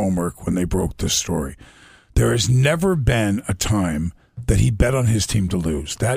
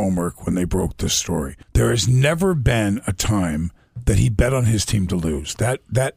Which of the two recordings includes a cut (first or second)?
second